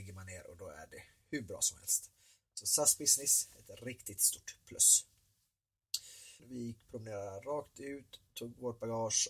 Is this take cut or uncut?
cut